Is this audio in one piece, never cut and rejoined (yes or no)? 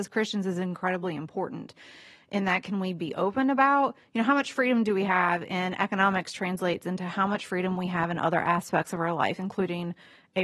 yes